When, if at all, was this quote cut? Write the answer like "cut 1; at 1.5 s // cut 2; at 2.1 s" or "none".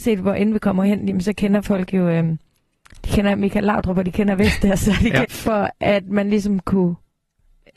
cut 1; at 5.2 s